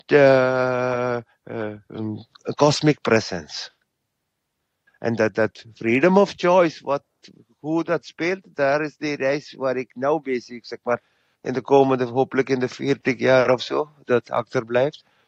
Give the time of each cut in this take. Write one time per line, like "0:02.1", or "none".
0:04.9
0:14.0